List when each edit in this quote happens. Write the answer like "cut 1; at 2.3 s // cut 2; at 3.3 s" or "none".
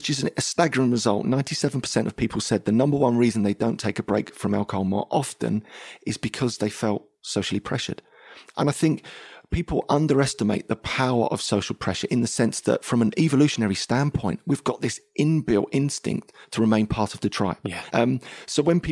cut 1; at 8.5 s // cut 2; at 17.9 s